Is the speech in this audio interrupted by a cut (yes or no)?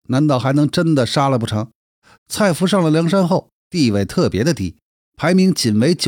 yes